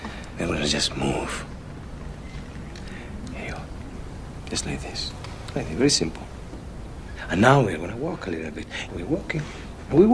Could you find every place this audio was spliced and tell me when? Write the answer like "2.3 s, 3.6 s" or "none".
8.9 s